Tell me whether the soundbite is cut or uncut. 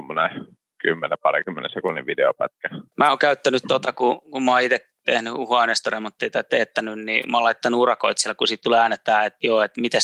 cut